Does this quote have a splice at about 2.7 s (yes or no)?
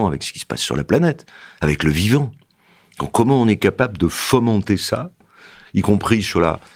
no